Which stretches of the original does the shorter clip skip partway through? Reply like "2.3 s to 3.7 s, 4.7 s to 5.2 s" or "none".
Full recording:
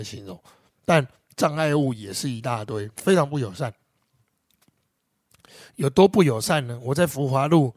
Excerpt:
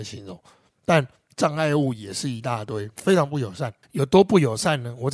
3.8 s to 5.7 s